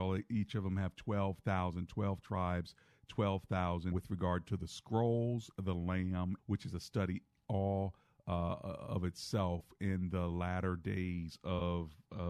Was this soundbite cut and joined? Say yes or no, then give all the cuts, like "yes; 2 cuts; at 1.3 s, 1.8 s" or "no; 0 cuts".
yes; 2 cuts; at 3.9 s, 6.4 s